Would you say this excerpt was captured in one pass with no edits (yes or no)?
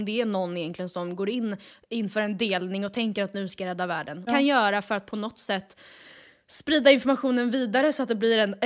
no